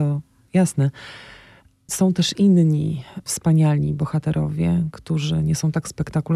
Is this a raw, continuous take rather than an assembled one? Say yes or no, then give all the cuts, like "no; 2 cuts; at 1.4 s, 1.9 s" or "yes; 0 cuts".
yes; 0 cuts